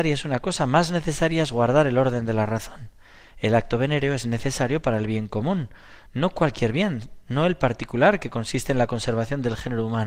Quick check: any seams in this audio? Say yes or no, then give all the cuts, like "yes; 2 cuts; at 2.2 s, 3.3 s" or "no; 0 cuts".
no; 0 cuts